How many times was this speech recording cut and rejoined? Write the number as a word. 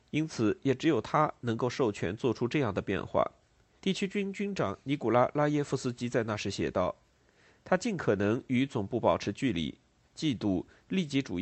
two